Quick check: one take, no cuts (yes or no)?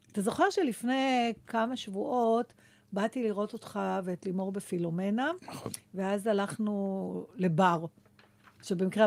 yes